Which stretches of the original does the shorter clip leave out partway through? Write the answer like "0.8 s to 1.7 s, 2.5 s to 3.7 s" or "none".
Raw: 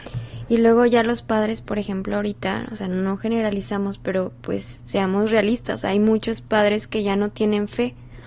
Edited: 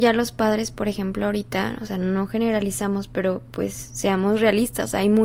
none